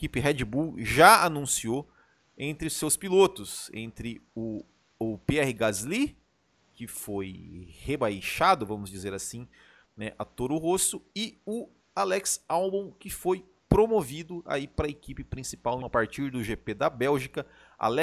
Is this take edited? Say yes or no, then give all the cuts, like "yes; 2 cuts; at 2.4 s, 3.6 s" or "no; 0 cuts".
yes; 2 cuts; at 9.9 s, 15.8 s